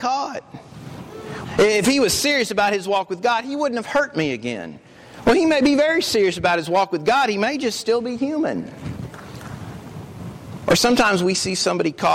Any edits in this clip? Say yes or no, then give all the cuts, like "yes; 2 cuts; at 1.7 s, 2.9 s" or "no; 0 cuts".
yes; 1 cut; at 1.4 s